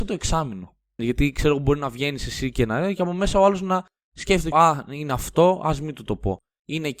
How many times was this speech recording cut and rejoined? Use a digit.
2